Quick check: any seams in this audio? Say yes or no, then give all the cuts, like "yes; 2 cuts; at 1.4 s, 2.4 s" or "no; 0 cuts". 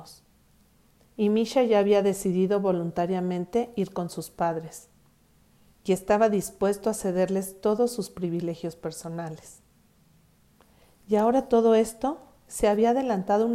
no; 0 cuts